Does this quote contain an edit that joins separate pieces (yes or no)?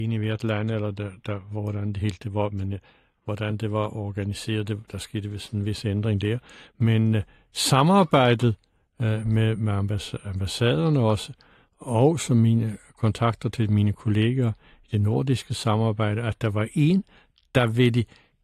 no